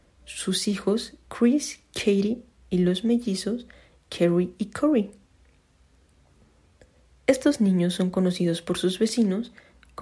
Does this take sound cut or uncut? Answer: uncut